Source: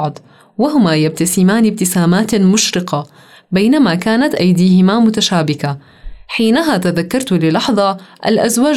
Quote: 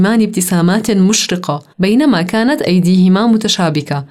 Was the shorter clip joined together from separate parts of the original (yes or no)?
yes